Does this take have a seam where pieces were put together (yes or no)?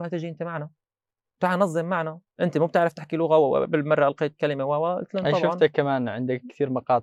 yes